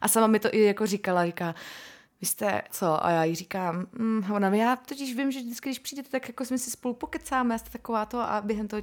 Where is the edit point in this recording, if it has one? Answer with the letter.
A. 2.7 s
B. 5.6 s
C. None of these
A